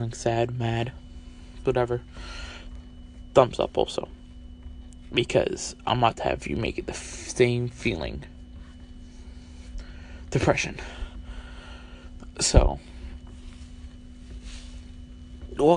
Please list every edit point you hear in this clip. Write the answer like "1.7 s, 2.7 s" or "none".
none